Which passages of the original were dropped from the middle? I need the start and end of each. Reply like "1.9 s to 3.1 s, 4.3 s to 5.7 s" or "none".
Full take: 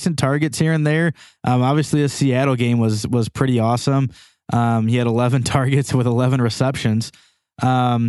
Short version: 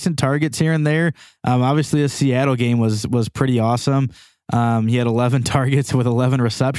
none

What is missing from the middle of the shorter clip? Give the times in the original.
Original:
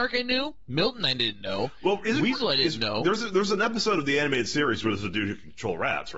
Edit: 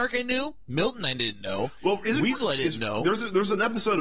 none

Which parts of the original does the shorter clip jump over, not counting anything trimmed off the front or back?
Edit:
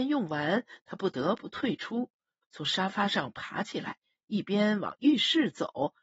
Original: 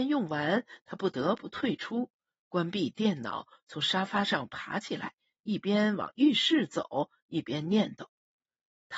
2.4 s to 3.6 s

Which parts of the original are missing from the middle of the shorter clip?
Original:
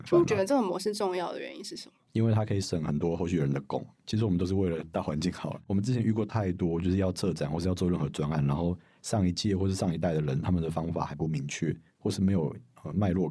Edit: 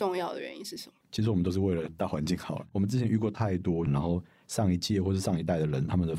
2.0 s to 4.0 s, 6.8 s to 8.4 s

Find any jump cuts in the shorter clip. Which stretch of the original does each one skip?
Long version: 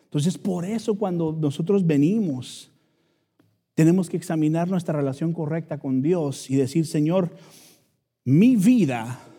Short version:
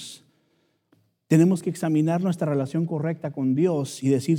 none

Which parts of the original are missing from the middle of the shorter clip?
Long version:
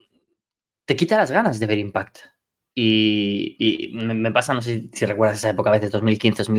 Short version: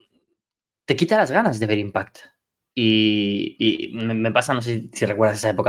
none

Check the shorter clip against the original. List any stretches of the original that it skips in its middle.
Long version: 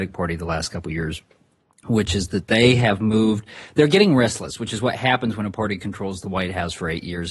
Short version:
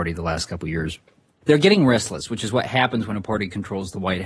1.6 s to 3.7 s

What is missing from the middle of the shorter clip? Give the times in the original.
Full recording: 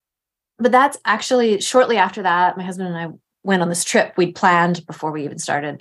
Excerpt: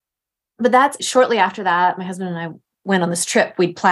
1.0 s to 1.6 s

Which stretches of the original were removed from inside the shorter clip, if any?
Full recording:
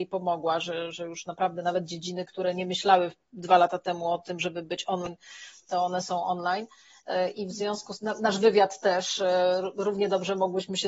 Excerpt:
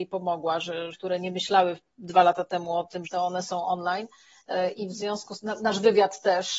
0.9 s to 2.3 s, 4.4 s to 5.6 s

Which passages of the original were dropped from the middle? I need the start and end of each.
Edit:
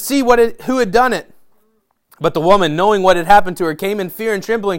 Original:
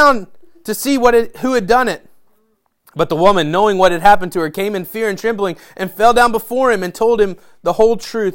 none

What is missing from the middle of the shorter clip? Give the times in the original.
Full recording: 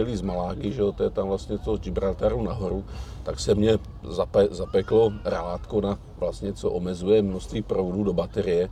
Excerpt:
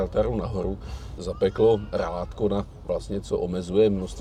3.2 s to 4.5 s

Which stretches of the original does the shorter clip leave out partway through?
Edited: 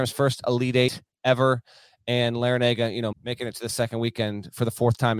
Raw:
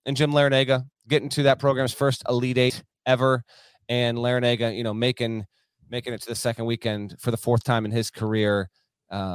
4.9 s to 5.8 s

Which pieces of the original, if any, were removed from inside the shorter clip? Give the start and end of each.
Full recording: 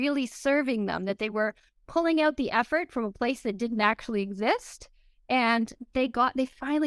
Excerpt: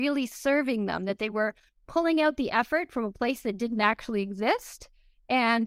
none

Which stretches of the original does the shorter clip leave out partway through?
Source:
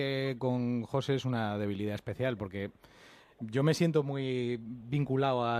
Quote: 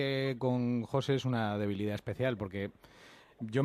none

